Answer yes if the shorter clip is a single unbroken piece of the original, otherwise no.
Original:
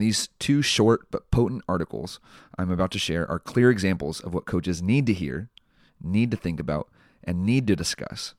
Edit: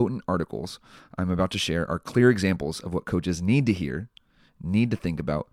yes